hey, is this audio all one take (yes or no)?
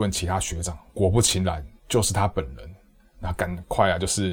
yes